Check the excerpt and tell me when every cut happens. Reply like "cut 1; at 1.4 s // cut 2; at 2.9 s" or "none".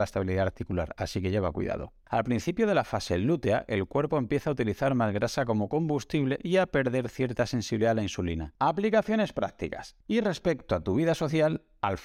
cut 1; at 8.6 s // cut 2; at 10.0 s